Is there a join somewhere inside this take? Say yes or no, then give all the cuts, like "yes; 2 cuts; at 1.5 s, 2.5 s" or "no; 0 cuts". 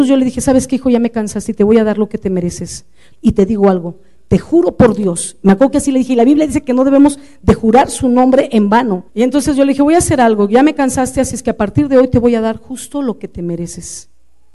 yes; 2 cuts; at 3.1 s, 9.1 s